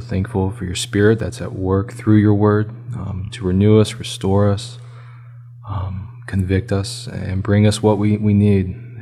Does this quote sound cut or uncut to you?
uncut